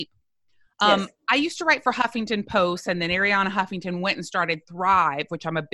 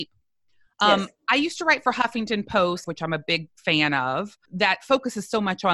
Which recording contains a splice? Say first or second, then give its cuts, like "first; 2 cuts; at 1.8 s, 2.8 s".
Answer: second; 2 cuts; at 2.8 s, 4.4 s